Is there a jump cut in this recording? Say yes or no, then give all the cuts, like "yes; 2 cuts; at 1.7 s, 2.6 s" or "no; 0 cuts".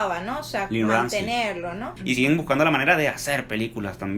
yes; 1 cut; at 2.0 s